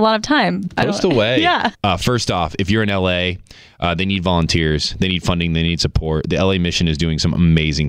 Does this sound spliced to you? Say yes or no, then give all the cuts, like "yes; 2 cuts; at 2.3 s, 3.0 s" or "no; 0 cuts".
yes; 1 cut; at 1.7 s